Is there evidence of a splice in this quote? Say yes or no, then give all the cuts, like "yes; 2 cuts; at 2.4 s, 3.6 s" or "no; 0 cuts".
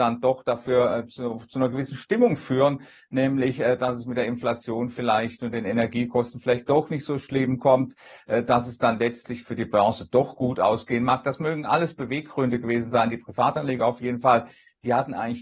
no; 0 cuts